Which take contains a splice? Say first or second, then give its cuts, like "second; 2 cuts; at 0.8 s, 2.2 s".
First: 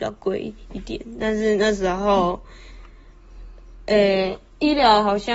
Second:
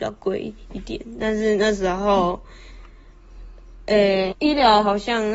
second; 1 cut; at 4.3 s